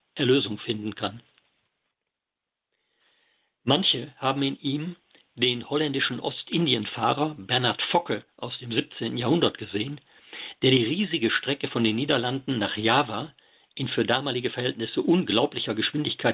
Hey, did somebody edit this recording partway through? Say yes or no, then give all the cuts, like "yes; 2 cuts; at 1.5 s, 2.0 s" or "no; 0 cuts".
no; 0 cuts